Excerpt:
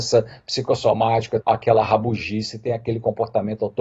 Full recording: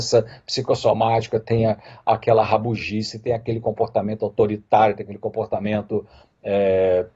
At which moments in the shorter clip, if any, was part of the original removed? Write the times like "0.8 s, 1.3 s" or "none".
1.4 s